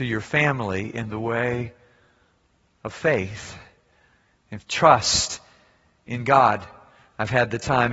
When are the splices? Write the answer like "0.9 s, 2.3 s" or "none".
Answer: none